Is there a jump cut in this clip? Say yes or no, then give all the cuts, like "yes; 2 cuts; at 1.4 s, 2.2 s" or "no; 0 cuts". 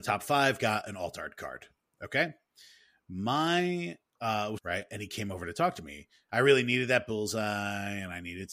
yes; 2 cuts; at 4.6 s, 6.3 s